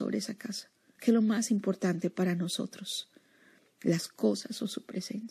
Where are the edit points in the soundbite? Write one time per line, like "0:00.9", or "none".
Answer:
0:01.0